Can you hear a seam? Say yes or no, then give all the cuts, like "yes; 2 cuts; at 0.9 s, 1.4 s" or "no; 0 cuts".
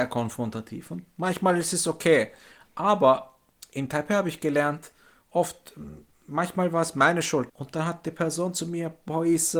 yes; 1 cut; at 7.5 s